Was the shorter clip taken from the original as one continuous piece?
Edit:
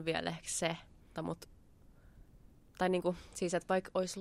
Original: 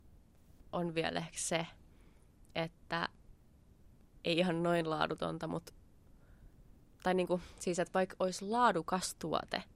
no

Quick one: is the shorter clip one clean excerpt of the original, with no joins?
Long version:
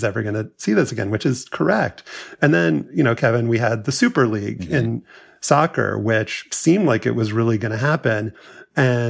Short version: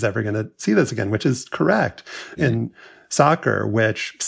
no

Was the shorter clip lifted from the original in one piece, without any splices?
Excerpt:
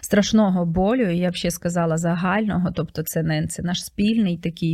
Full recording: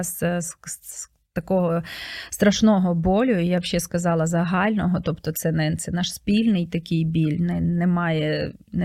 yes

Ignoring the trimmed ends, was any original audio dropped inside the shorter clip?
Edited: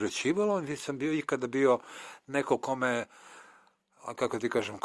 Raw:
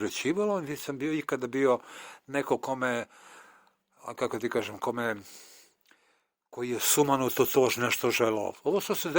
no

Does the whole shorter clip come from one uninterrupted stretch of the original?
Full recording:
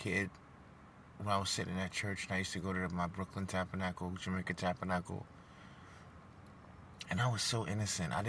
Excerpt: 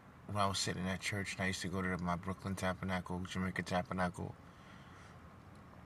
yes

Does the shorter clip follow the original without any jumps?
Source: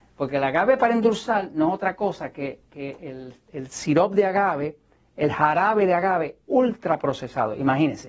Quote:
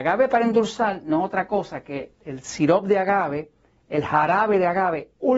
no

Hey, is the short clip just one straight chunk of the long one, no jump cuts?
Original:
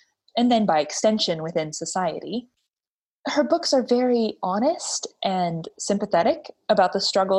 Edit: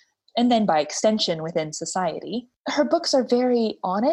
no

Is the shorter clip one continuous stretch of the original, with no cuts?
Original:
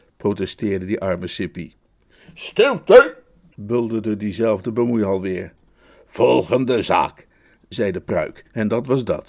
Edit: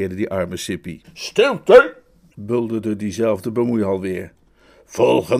no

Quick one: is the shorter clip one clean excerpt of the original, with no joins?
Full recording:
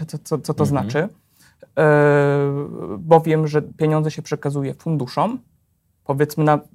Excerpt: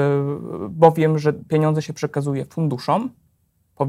yes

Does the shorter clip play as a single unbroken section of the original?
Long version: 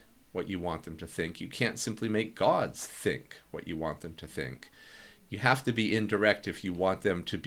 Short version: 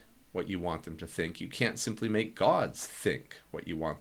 yes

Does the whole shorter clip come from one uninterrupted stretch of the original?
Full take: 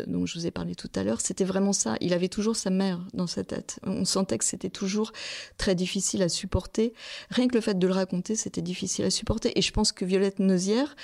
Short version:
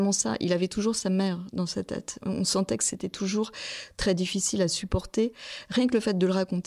yes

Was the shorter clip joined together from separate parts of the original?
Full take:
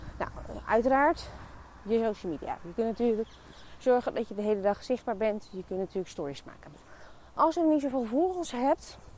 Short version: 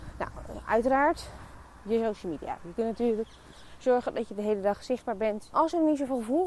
yes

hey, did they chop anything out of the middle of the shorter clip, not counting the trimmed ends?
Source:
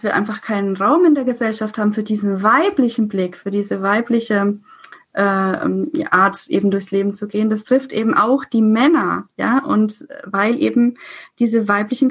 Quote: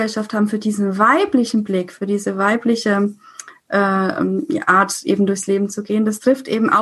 no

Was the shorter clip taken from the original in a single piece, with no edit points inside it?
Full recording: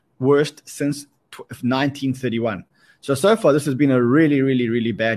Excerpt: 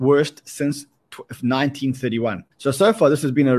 no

